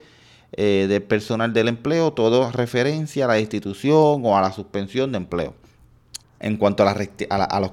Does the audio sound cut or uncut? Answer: cut